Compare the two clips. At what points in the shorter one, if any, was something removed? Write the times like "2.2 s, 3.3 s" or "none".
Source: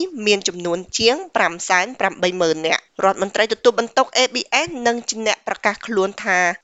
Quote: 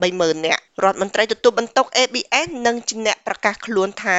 none